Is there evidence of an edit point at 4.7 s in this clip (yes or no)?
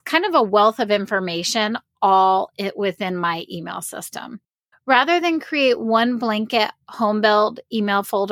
yes